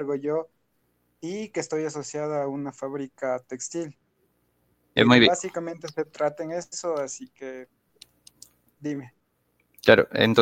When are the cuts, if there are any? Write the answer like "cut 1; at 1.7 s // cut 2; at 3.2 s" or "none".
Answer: cut 1; at 5.0 s